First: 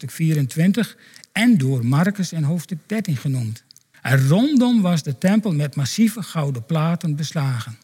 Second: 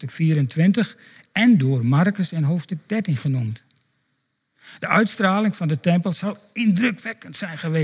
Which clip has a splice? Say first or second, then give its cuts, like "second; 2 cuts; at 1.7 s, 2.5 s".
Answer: first; 1 cut; at 3.9 s